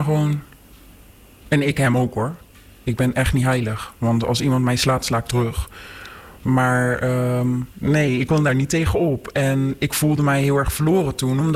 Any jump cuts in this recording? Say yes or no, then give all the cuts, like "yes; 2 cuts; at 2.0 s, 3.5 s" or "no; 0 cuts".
no; 0 cuts